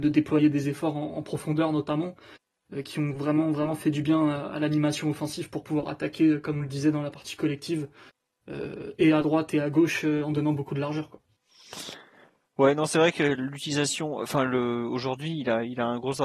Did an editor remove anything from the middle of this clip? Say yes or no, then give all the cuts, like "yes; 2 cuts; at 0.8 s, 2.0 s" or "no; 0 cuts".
no; 0 cuts